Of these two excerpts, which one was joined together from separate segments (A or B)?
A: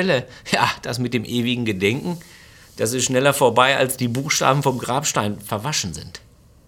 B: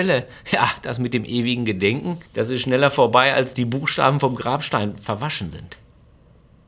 B